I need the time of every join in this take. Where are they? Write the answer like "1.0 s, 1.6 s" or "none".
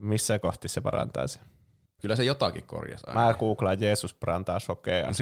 2.0 s